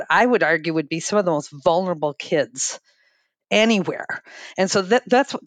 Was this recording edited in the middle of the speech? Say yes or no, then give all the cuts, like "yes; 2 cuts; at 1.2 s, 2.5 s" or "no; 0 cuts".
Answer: no; 0 cuts